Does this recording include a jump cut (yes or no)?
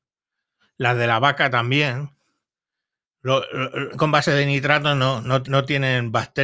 yes